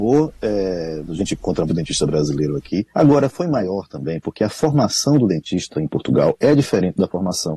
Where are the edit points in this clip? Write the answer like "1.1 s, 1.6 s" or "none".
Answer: 1.7 s, 2.9 s